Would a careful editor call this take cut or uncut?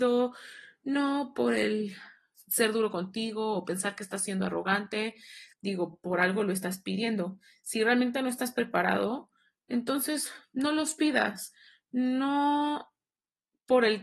cut